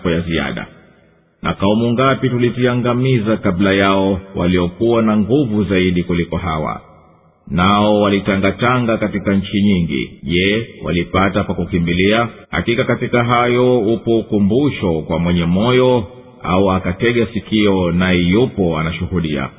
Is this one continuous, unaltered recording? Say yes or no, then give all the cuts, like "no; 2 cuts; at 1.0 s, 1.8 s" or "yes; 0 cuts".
no; 2 cuts; at 10.2 s, 12.4 s